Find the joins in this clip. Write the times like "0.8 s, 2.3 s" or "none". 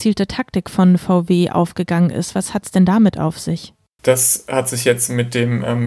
4.0 s